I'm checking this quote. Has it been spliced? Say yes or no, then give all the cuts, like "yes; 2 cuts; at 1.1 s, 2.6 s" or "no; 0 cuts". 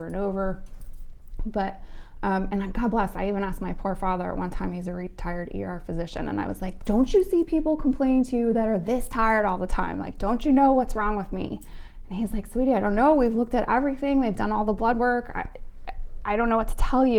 yes; 1 cut; at 6.8 s